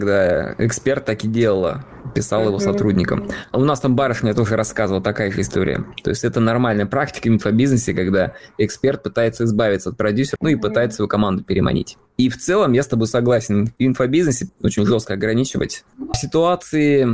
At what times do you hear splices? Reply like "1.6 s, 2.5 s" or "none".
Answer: 10.4 s, 15.9 s